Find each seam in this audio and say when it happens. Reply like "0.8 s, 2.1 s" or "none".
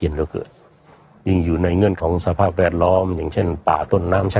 2.0 s